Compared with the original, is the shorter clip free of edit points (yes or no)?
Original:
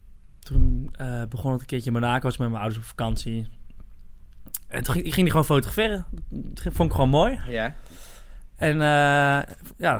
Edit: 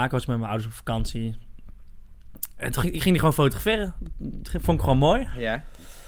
yes